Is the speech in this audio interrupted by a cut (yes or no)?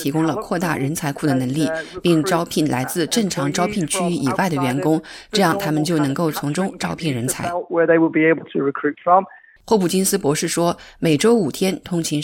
no